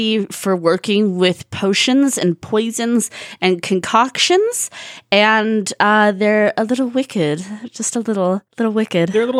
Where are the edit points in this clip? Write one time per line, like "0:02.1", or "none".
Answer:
none